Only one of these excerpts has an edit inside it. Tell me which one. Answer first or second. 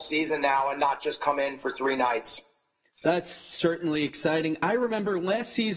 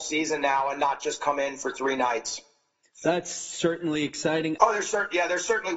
second